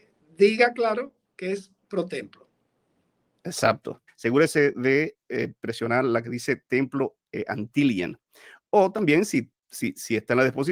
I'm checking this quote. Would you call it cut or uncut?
cut